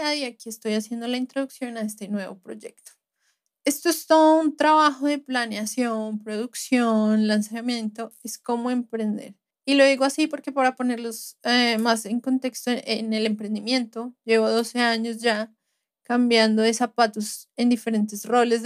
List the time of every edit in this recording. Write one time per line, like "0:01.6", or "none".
none